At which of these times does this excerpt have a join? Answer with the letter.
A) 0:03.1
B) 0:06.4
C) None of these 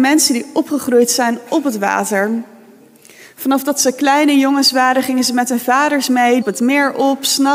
B